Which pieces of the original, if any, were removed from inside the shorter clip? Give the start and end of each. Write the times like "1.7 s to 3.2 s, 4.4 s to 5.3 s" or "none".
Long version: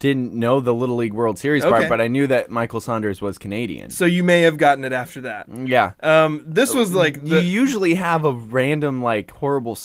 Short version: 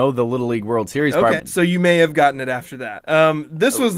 1.9 s to 3.8 s, 5.4 s to 6.0 s